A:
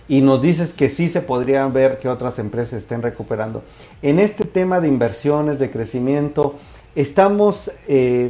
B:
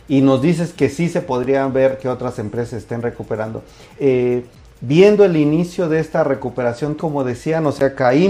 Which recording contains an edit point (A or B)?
B